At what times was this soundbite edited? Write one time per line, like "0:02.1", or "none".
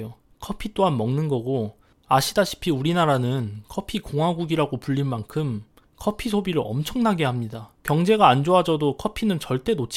0:07.8